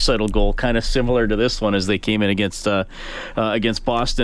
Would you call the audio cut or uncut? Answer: uncut